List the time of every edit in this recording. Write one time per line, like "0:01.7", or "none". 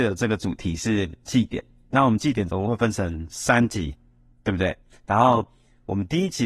none